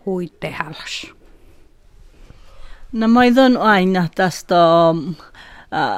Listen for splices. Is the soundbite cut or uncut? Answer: uncut